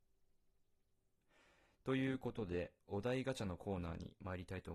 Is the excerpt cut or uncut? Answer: uncut